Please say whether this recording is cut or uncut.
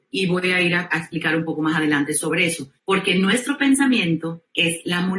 cut